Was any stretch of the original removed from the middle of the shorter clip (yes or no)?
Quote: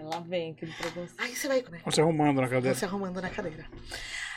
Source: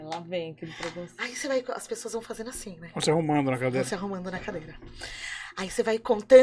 yes